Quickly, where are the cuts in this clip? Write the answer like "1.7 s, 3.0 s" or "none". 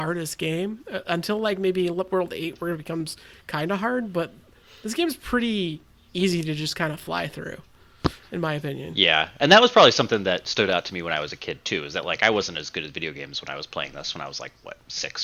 none

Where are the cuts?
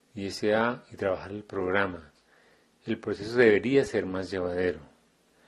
none

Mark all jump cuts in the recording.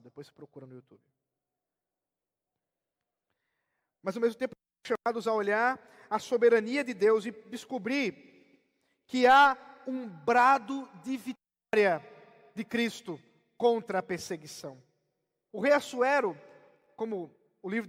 15.5 s

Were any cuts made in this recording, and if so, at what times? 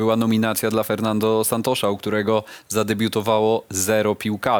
none

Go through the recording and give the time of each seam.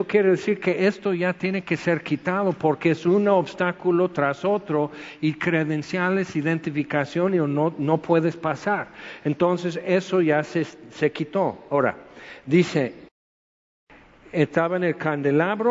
none

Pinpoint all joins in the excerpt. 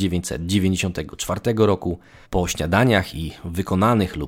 2.2 s

